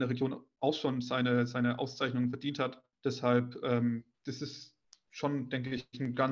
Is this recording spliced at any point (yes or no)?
yes